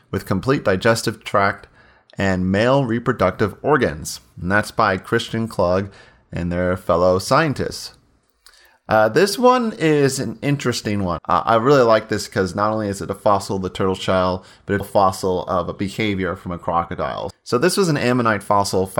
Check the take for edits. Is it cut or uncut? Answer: cut